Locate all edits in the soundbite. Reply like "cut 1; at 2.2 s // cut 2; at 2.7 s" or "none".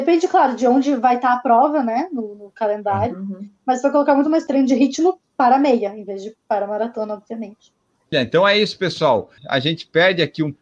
cut 1; at 8.1 s // cut 2; at 9.4 s